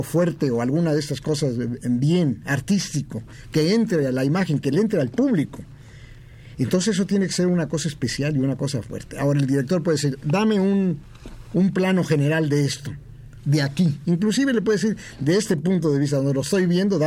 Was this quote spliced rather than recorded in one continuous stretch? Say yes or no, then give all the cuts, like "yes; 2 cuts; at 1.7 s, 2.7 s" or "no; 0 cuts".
no; 0 cuts